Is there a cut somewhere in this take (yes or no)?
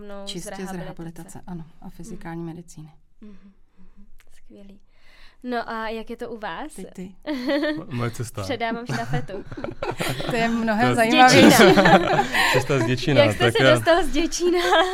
no